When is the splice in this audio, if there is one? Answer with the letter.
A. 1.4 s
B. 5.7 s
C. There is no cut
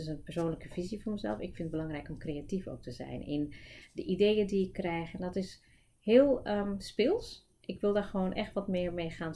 C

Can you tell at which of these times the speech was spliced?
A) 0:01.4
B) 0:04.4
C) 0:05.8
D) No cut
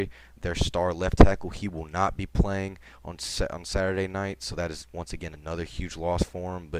D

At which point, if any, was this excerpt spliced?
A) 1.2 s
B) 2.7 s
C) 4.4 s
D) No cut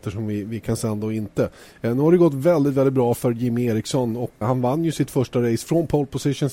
C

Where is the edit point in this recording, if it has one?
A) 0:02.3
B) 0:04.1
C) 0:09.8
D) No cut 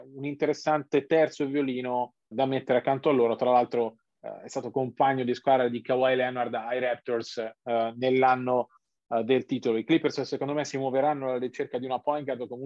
A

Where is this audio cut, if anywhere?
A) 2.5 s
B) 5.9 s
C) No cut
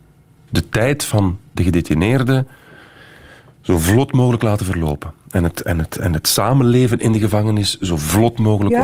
C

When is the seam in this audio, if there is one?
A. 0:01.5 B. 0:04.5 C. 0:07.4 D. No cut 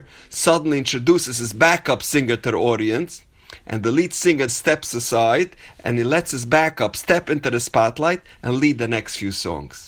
B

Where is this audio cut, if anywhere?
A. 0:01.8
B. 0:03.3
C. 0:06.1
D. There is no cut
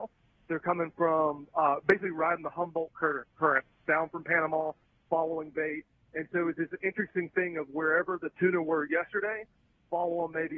D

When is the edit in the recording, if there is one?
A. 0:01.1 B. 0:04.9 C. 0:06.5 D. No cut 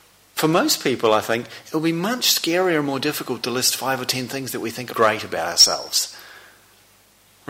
B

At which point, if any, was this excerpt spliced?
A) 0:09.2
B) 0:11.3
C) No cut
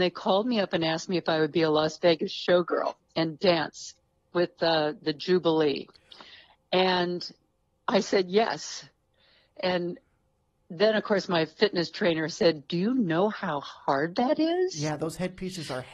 C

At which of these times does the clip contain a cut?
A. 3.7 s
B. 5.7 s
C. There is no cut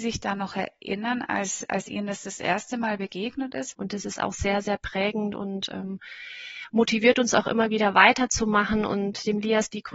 A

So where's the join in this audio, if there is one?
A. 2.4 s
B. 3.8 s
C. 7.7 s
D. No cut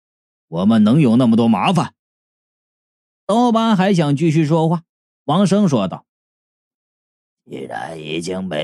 A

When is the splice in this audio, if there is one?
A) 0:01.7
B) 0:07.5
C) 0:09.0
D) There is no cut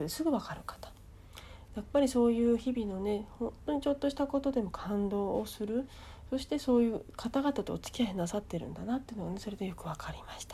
A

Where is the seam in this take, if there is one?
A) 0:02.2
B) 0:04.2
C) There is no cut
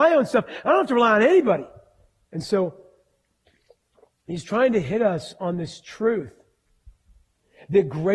A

